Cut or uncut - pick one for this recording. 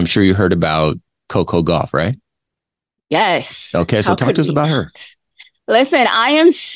uncut